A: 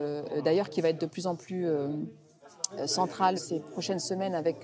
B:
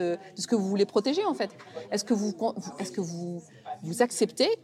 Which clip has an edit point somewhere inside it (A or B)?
A